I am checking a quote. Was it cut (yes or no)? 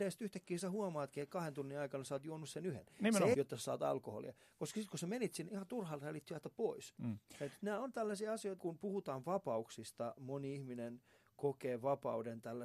yes